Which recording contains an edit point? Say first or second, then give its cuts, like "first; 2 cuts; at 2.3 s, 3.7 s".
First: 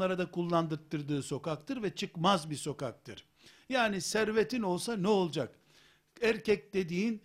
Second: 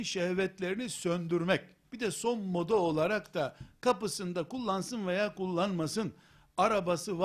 second; 1 cut; at 1.9 s